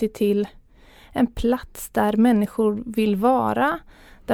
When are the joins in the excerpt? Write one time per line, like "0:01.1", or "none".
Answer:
none